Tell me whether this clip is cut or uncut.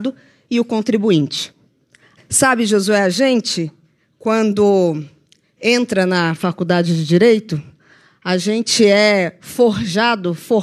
cut